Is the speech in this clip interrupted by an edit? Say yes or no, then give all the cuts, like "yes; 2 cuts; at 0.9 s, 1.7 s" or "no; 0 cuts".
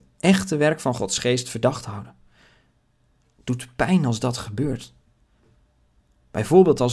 no; 0 cuts